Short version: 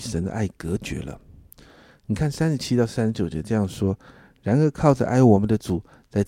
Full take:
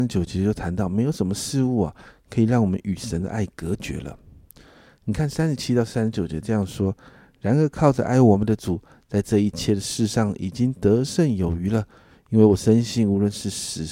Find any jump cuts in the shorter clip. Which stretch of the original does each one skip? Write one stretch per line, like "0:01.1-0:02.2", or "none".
none